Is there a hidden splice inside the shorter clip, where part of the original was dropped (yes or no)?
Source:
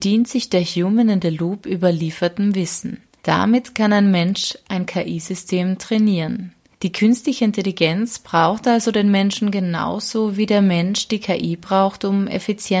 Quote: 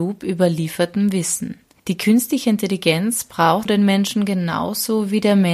yes